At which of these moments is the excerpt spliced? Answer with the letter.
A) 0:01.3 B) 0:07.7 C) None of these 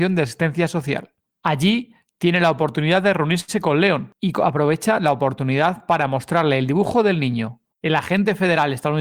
B